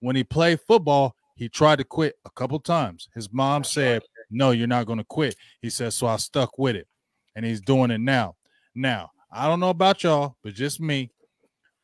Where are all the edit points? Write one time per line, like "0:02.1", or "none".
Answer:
none